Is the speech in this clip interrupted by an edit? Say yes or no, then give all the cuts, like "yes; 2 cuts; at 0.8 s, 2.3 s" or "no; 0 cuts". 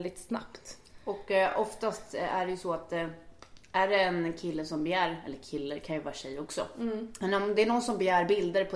no; 0 cuts